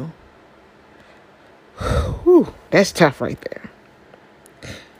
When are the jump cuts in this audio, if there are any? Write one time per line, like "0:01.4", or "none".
0:02.7